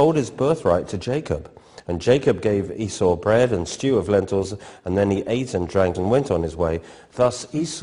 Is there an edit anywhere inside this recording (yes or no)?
yes